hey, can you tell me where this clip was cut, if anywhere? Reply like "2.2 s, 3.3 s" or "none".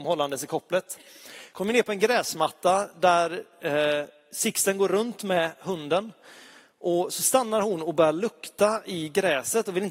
none